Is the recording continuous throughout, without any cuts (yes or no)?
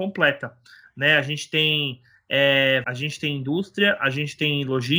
no